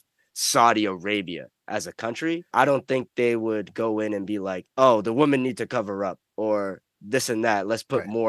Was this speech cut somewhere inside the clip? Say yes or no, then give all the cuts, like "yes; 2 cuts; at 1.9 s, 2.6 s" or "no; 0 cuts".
yes; 2 cuts; at 2.5 s, 4.7 s